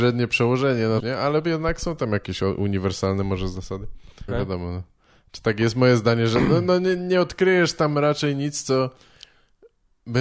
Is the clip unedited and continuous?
no; 2 cuts; at 1.0 s, 4.3 s

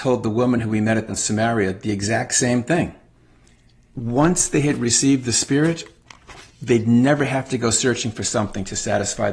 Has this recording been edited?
yes; 3 cuts; at 1.1 s, 3.9 s, 6.5 s

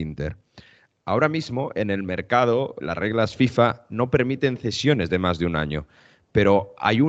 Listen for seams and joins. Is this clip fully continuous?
no; 1 cut; at 2.8 s

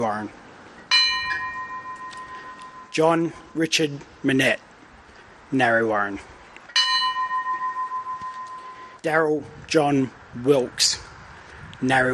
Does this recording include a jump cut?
yes; 1 cut; at 9.0 s

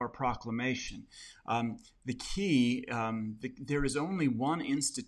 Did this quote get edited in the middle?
no; 0 cuts

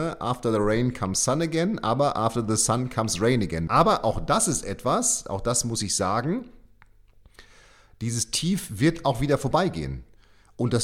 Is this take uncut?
no; 1 cut; at 3.7 s

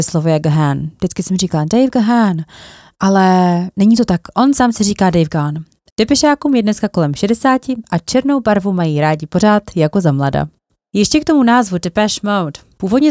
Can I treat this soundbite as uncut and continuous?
no; 1 cut; at 5.9 s

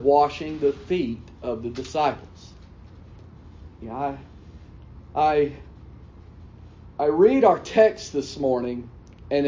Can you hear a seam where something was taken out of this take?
yes; 1 cut; at 3.8 s

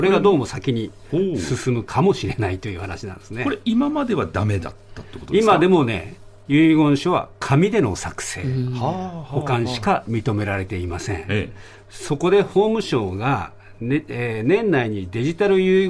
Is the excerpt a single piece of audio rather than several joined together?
yes; 0 cuts

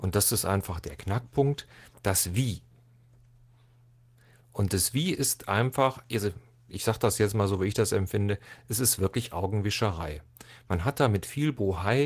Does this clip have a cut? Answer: no; 0 cuts

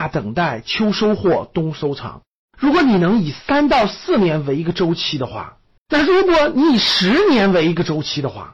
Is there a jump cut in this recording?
yes; 1 cut; at 5.8 s

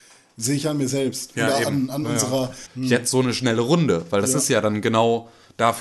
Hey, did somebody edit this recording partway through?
yes; 1 cut; at 2.7 s

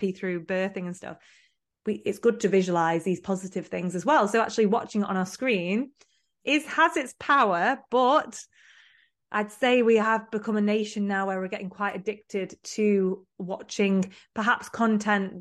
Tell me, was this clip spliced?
yes; 1 cut; at 6.4 s

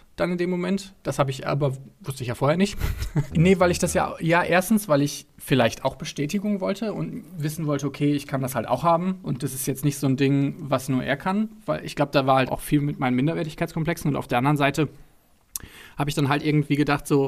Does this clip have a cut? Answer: yes; 2 cuts; at 3.3 s, 12.5 s

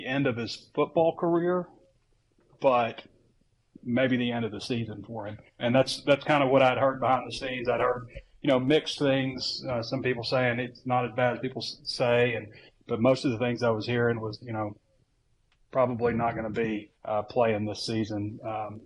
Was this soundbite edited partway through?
yes; 2 cuts; at 5.6 s, 16.9 s

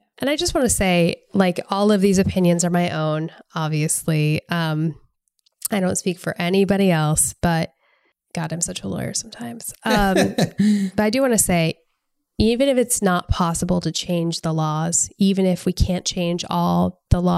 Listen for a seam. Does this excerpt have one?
no; 0 cuts

